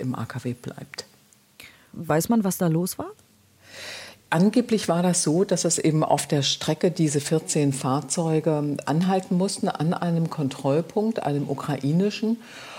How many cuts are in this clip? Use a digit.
1